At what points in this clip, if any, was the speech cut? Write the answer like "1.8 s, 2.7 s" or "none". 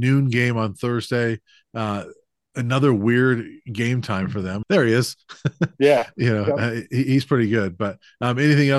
4.6 s